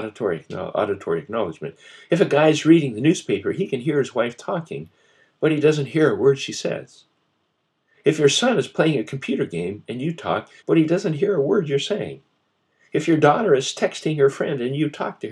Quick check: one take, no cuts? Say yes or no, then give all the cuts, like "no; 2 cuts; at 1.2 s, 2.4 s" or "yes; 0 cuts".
no; 1 cut; at 10.6 s